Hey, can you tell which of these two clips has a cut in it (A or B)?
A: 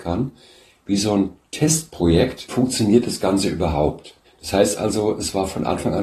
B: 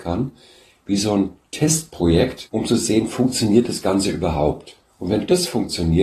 A